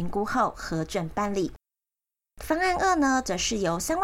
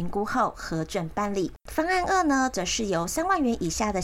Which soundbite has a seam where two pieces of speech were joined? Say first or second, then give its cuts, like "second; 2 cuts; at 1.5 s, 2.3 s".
second; 1 cut; at 1.6 s